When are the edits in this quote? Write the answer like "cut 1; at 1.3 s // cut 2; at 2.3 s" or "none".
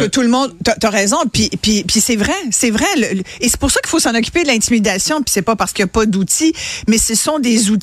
cut 1; at 5.2 s

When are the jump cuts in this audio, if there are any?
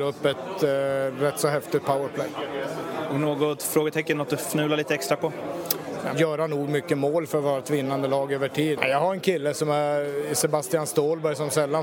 cut 1; at 6.1 s // cut 2; at 8.8 s

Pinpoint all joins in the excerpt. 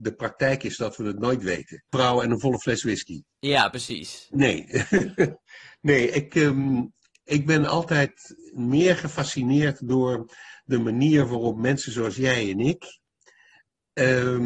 cut 1; at 1.9 s

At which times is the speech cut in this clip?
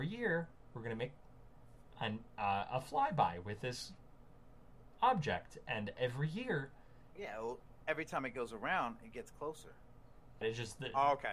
cut 1; at 7.2 s // cut 2; at 10.4 s

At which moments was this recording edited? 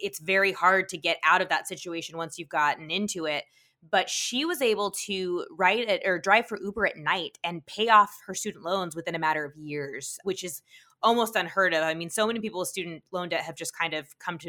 cut 1; at 10.2 s

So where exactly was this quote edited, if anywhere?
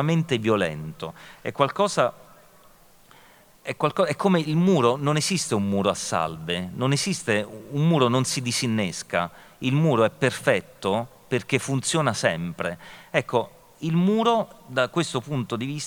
none

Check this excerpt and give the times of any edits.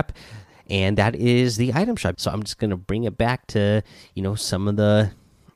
cut 1; at 2.1 s

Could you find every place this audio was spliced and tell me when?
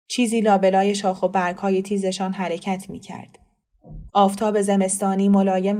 cut 1; at 4.1 s

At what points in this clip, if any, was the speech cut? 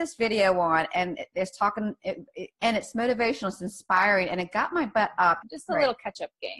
cut 1; at 2.5 s // cut 2; at 5.4 s

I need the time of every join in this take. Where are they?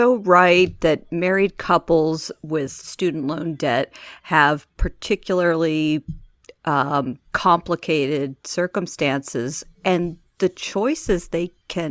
cut 1; at 7.2 s

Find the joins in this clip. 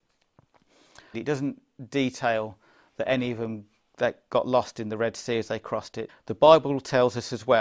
cut 1; at 1.1 s // cut 2; at 6.1 s

